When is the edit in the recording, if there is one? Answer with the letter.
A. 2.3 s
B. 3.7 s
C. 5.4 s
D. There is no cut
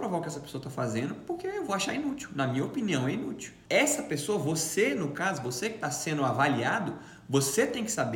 B